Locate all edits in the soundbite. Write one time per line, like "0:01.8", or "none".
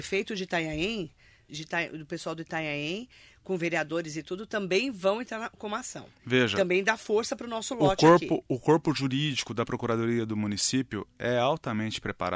0:01.5